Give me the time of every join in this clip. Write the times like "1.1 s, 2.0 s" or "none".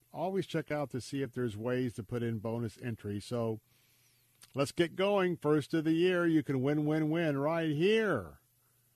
none